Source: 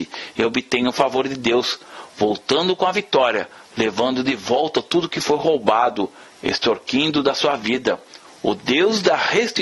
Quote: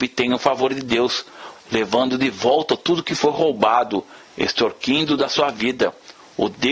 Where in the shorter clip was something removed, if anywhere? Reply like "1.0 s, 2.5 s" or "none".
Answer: 1.6 s